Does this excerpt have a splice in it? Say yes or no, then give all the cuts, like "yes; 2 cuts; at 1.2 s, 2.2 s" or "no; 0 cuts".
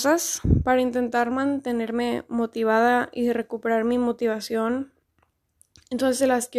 no; 0 cuts